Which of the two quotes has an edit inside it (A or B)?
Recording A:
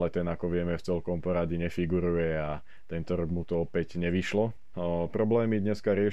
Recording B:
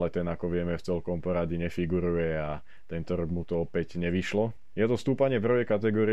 A